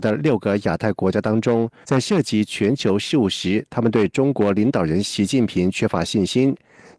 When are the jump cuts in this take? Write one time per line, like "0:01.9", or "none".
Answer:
0:01.8